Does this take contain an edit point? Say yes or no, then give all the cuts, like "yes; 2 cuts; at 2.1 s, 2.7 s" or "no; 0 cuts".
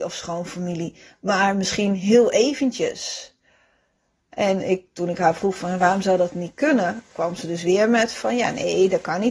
no; 0 cuts